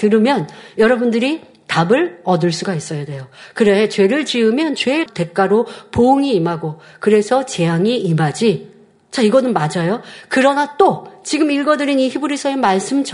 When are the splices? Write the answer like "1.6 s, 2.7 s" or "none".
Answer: none